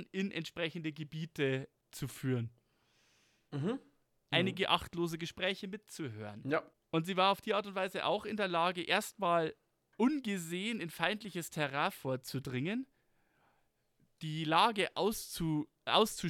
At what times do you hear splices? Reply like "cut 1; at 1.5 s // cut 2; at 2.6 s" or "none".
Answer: cut 1; at 4.3 s